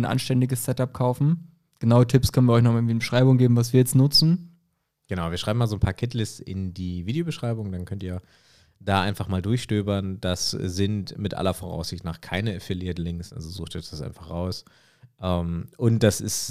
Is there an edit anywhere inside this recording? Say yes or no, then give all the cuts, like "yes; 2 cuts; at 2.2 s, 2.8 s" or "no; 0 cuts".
no; 0 cuts